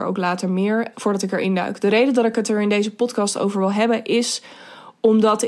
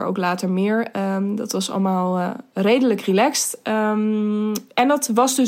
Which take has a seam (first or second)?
first